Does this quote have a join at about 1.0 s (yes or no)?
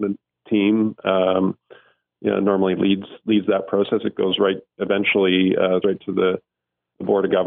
no